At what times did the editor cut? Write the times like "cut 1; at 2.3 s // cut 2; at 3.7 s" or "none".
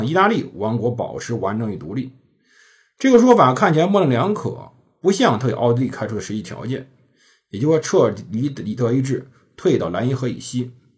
none